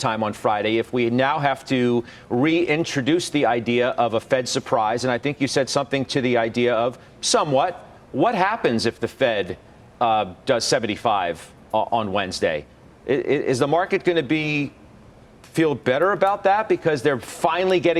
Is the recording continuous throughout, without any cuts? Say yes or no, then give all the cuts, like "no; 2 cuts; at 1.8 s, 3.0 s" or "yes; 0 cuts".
no; 1 cut; at 8.0 s